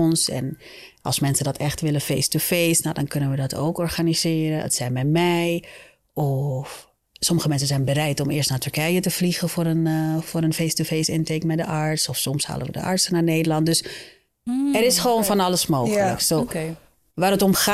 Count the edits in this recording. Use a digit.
0